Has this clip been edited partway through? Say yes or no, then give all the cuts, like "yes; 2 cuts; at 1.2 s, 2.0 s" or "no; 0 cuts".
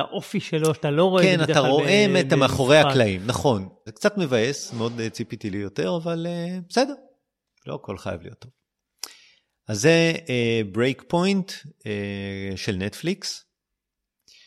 yes; 1 cut; at 3.9 s